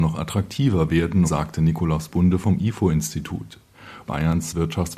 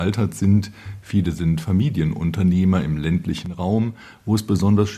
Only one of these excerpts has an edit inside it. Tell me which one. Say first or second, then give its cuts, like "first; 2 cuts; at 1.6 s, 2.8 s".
first; 2 cuts; at 1.2 s, 4.0 s